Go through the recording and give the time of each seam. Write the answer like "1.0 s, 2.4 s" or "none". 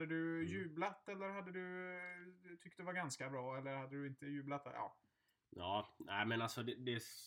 none